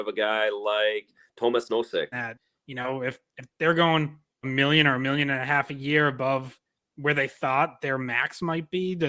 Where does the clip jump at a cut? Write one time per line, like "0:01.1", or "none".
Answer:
0:02.1
0:04.4